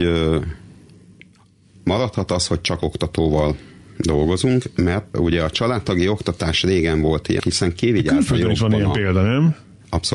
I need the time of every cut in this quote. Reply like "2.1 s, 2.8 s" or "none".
5.1 s, 7.4 s

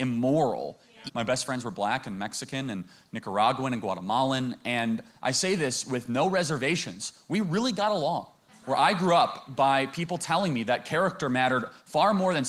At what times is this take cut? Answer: 1.1 s, 8.5 s

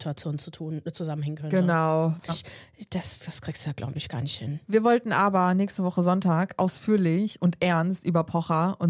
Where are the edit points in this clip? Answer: 2.3 s

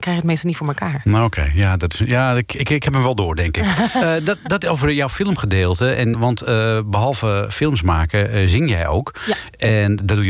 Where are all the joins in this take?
6.1 s

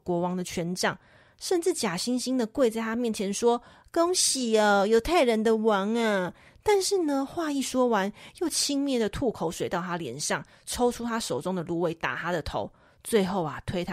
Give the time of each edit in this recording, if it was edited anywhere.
none

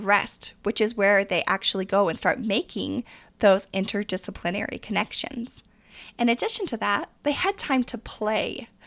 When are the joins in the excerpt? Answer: none

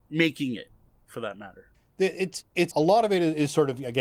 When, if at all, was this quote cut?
2.7 s

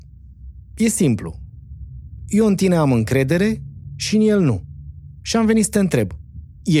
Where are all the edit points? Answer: none

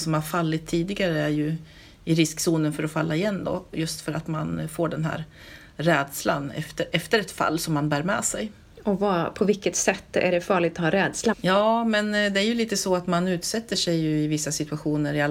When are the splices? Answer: 11.3 s

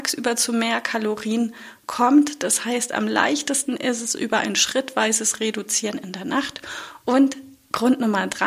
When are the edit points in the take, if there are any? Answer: 7.0 s

